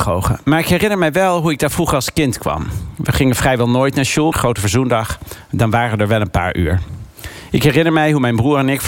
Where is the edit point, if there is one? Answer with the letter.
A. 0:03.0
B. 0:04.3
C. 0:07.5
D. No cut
B